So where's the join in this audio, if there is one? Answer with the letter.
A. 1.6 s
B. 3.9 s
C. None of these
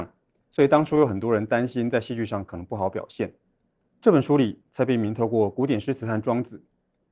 B